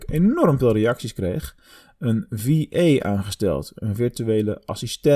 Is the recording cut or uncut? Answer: uncut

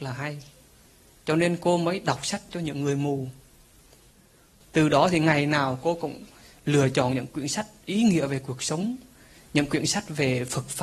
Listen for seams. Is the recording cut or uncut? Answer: uncut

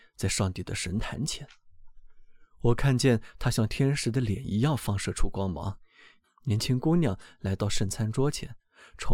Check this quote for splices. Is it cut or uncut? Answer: uncut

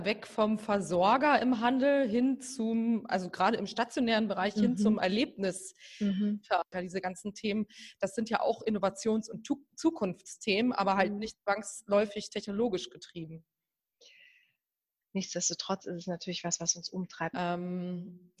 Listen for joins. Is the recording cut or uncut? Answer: cut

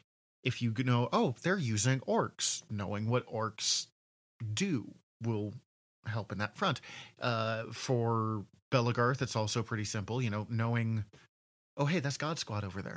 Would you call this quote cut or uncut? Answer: uncut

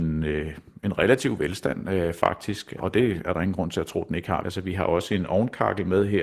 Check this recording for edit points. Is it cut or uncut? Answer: cut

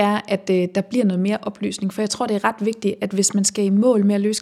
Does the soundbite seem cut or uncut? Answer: uncut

